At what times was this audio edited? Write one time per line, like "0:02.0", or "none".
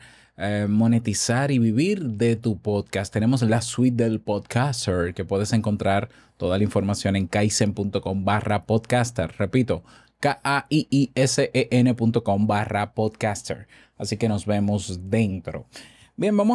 none